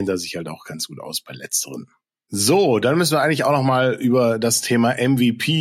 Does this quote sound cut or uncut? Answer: uncut